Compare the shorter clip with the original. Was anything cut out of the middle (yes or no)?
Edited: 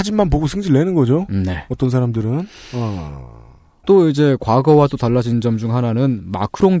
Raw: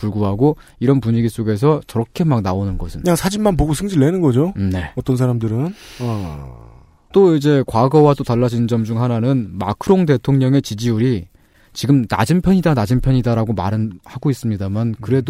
no